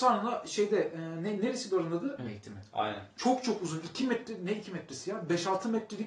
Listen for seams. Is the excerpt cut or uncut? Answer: cut